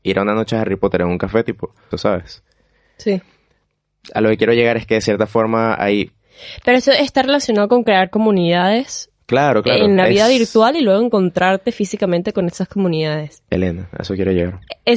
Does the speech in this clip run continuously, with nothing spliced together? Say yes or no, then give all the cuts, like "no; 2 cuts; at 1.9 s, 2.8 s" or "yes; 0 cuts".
no; 1 cut; at 1.9 s